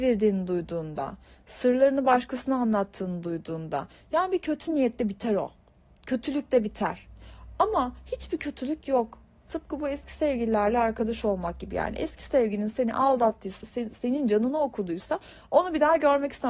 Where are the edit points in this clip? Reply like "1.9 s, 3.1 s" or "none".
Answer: 9.4 s, 13.6 s